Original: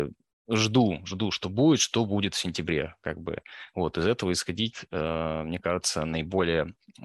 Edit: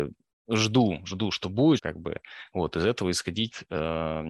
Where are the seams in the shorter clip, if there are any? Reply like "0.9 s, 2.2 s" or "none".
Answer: 1.8 s